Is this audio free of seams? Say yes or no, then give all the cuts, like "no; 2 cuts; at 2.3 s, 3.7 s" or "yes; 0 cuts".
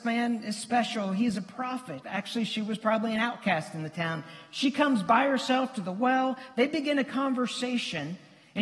no; 1 cut; at 2.0 s